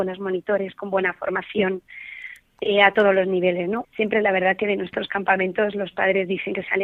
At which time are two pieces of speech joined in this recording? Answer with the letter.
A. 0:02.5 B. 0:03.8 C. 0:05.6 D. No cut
B